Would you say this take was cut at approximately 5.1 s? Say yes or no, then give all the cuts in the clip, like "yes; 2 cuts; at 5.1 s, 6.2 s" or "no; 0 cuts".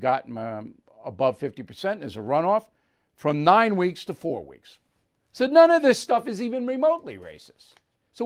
yes; 1 cut; at 5.1 s